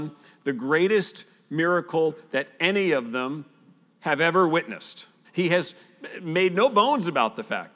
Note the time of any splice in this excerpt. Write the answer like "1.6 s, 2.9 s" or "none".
5.2 s